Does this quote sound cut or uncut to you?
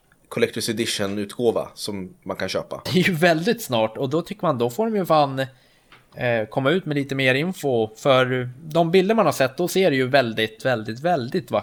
cut